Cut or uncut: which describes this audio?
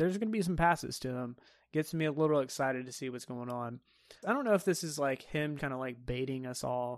cut